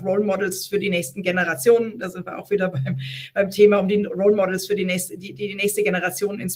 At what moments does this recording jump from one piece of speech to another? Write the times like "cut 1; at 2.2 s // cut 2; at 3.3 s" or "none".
none